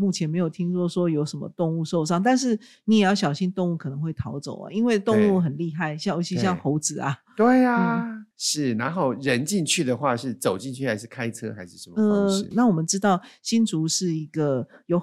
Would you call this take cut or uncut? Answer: cut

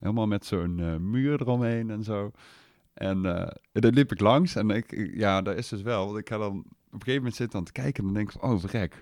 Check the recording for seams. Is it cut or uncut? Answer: uncut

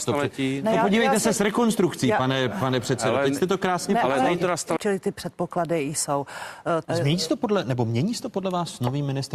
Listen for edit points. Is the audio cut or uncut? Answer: cut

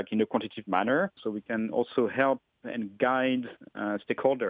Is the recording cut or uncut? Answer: cut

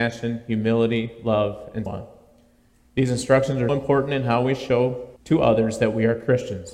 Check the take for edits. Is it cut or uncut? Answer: cut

